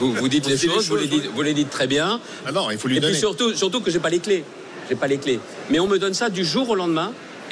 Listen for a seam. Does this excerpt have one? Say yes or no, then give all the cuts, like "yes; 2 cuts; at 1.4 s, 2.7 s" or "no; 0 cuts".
yes; 1 cut; at 2.4 s